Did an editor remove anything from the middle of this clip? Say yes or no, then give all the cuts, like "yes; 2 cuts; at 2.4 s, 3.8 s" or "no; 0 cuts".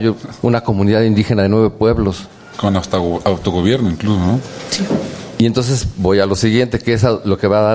no; 0 cuts